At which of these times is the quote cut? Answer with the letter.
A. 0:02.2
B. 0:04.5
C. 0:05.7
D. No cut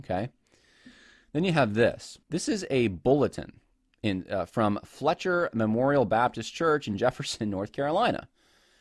A